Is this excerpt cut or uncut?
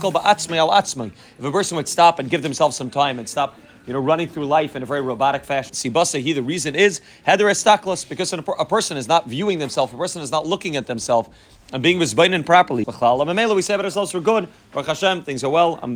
cut